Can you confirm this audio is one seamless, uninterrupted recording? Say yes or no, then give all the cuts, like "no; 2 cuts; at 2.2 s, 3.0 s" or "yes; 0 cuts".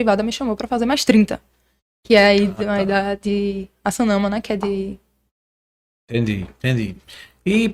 yes; 0 cuts